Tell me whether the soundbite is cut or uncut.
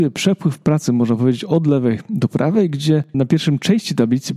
cut